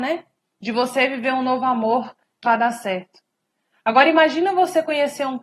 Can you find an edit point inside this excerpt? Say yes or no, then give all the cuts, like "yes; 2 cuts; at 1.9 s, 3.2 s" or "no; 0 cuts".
yes; 1 cut; at 2.4 s